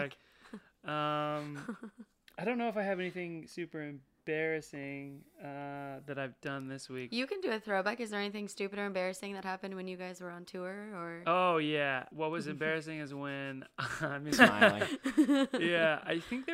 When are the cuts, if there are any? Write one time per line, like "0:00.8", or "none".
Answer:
0:12.1
0:14.3